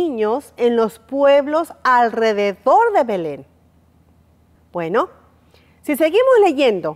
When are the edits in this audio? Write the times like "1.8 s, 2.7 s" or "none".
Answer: 4.6 s

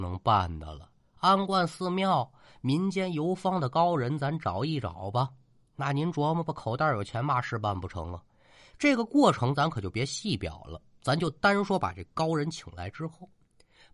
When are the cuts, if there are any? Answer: none

